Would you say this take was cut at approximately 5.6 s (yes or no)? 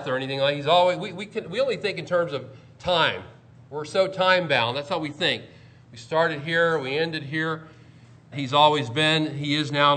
no